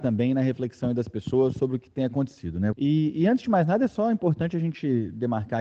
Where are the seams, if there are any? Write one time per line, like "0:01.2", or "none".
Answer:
0:02.7